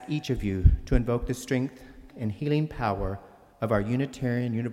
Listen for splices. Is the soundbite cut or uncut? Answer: cut